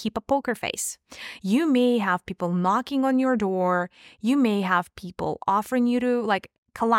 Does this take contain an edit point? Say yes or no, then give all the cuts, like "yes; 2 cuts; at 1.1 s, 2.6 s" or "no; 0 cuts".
yes; 1 cut; at 1.4 s